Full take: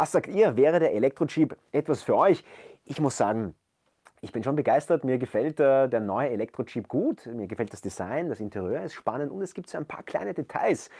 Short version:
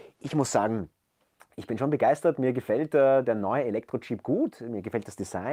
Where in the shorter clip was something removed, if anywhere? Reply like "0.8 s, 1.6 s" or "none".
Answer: none